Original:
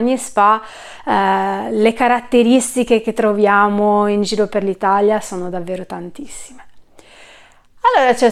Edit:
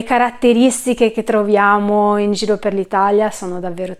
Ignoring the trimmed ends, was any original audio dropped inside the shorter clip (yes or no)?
no